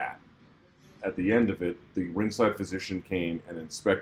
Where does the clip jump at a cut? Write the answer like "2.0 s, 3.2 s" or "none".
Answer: 1.0 s